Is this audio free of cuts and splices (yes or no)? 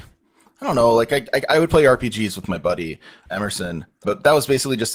no